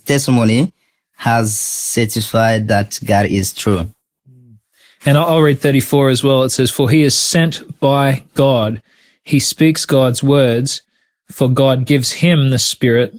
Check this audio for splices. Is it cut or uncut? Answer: uncut